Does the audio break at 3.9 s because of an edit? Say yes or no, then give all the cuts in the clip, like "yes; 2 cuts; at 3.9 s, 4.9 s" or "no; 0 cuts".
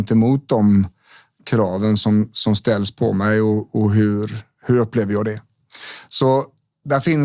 no; 0 cuts